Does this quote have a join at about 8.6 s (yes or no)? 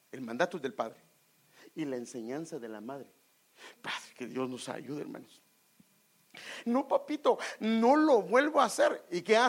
no